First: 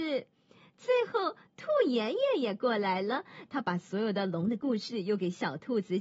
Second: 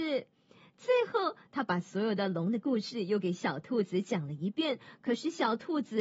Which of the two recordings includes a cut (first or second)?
second